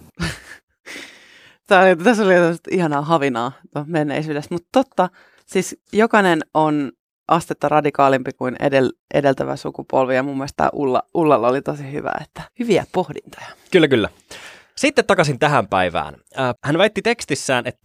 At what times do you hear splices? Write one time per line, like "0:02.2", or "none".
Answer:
0:12.5
0:16.6